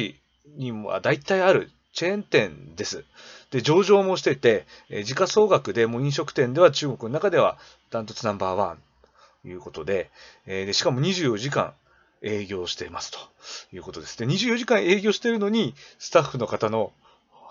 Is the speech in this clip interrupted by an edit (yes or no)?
no